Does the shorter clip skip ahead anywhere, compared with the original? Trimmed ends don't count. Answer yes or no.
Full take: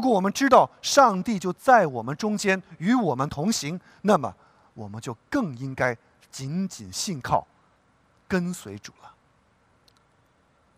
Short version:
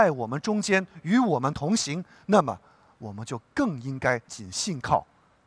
yes